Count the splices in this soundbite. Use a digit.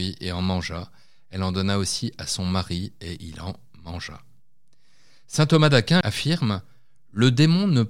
1